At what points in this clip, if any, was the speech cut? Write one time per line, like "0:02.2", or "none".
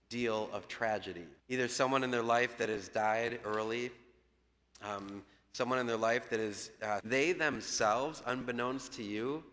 0:01.4
0:07.0